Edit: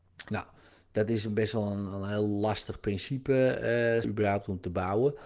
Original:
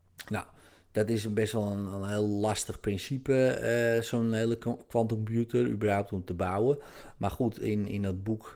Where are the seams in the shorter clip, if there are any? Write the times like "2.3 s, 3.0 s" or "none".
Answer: 4.0 s